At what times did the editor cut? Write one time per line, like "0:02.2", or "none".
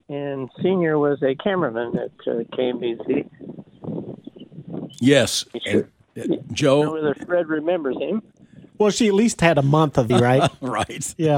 0:08.8
0:10.1